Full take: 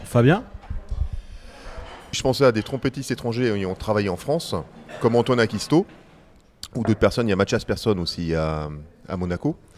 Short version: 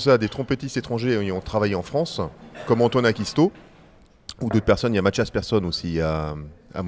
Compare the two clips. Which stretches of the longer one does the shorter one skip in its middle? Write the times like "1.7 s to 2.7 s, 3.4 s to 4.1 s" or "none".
none

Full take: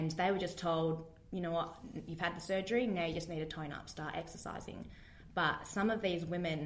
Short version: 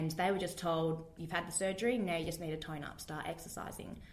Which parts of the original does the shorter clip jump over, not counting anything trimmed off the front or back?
1.2 s to 2.1 s

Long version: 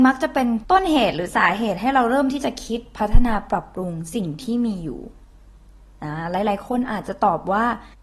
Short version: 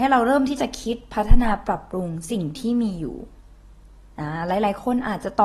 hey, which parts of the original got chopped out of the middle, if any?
none

